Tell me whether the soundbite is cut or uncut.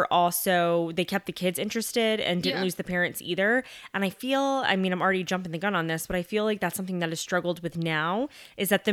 uncut